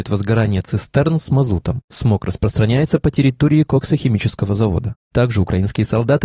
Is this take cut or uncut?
uncut